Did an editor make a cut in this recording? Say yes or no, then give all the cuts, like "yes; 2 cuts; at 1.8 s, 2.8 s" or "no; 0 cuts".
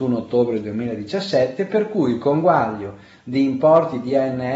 no; 0 cuts